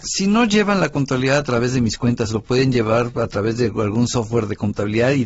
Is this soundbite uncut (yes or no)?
yes